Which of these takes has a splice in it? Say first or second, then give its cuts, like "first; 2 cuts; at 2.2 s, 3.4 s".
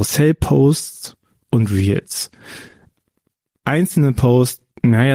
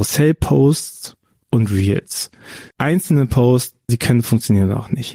second; 2 cuts; at 2.7 s, 3.9 s